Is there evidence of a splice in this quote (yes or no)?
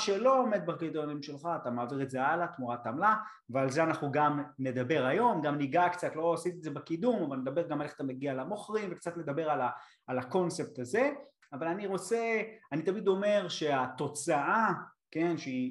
no